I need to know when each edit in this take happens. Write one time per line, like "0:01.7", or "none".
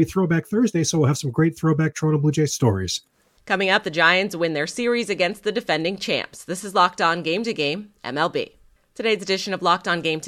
none